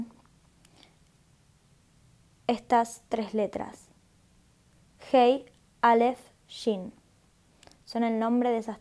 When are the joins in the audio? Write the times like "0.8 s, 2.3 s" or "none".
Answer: none